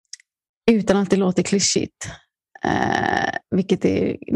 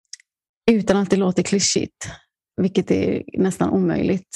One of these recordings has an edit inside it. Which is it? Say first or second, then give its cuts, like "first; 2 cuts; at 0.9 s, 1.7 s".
second; 1 cut; at 2.5 s